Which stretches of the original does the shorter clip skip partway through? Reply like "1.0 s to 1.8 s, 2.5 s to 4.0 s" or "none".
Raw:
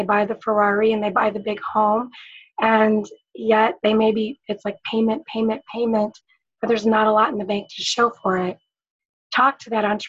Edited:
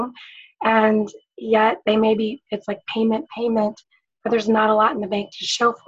5.2 s to 5.6 s

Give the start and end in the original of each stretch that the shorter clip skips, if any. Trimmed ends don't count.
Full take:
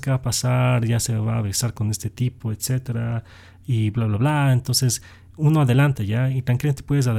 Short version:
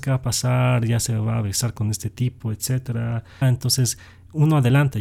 3.4 s to 4.5 s

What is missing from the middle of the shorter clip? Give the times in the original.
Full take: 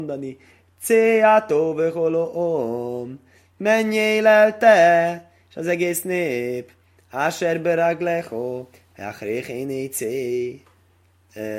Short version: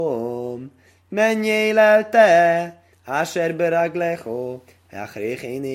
5.4 s to 7.0 s

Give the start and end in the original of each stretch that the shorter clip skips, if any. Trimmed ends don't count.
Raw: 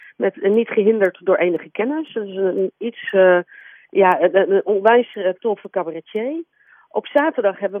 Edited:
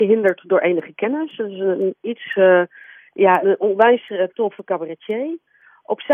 4.2 s to 4.5 s

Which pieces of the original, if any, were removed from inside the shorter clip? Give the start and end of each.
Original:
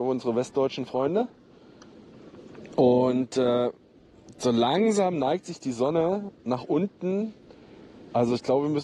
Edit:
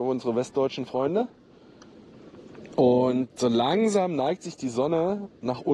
3.3 s to 4.3 s

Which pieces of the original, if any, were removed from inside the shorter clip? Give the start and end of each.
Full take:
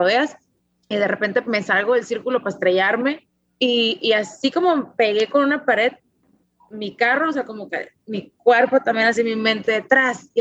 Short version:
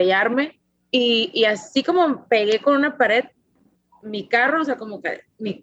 none

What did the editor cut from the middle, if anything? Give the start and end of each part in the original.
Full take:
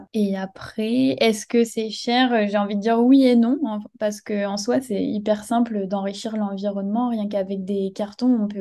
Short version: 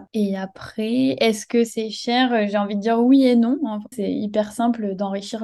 3.9 s to 4.8 s

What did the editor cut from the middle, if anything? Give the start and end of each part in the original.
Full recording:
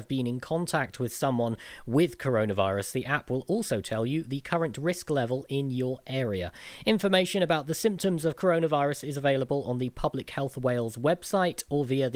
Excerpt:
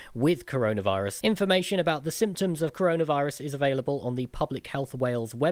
2.9 s to 6.8 s

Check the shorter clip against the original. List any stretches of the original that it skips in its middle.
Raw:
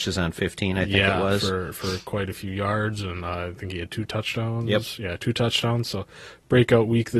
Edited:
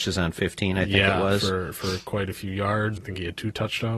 3.0 s to 3.5 s

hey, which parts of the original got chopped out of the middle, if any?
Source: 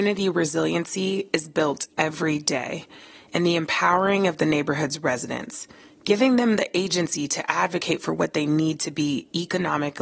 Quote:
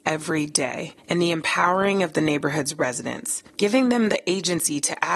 2.9 s to 3.2 s, 5.7 s to 6.0 s

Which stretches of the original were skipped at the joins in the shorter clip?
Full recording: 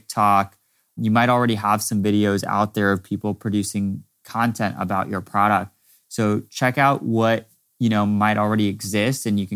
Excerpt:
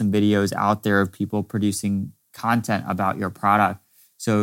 none

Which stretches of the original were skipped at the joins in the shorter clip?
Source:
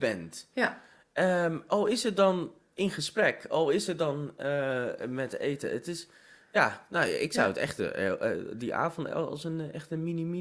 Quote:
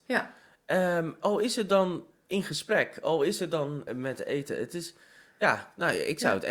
4.3 s to 5.0 s

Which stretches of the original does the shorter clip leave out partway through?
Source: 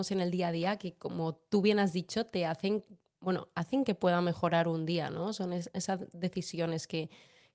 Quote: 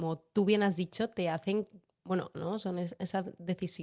3.5 s to 5.1 s

